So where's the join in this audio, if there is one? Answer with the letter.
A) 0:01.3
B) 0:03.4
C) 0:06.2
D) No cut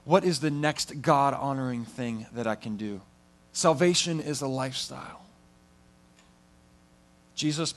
B